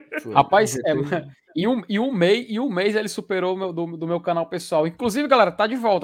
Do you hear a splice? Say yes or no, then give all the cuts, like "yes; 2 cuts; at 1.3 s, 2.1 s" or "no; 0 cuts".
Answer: no; 0 cuts